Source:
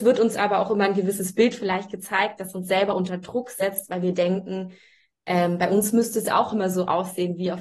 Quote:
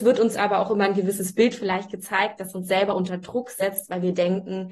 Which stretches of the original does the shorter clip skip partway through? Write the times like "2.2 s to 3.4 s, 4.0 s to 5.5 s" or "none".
none

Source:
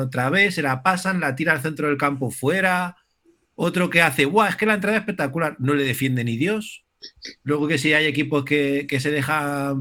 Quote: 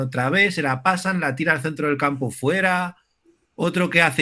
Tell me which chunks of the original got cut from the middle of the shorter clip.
none

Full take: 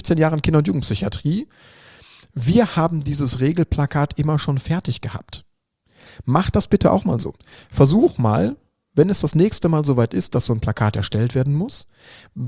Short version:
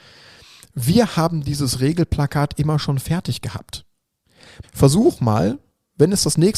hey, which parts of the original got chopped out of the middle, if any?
6.2 s to 7.6 s

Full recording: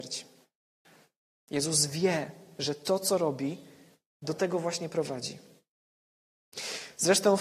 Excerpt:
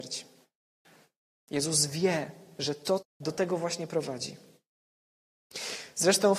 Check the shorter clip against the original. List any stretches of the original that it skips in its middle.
3.0 s to 4.0 s

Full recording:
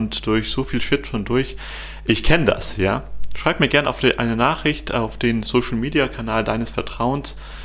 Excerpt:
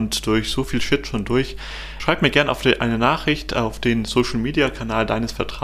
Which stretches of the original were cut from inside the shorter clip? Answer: 2.0 s to 3.4 s

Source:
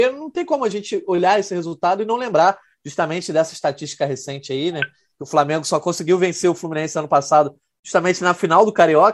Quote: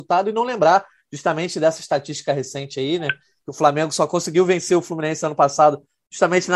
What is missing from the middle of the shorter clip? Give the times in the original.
none

